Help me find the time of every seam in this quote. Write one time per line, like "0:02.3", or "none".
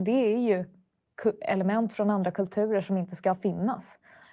none

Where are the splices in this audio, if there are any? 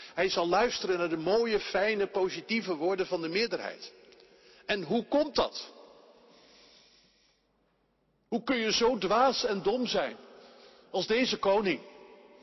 none

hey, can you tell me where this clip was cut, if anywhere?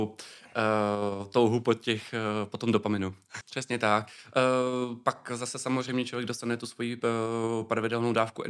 0:03.4

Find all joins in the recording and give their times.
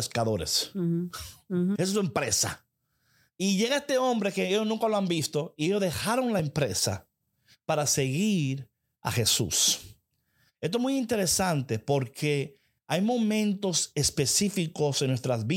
0:01.8

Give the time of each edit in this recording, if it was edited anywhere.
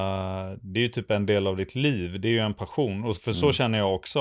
none

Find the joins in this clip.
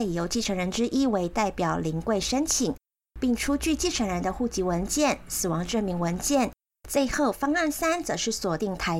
0:06.7

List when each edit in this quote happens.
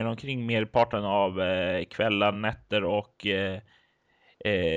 none

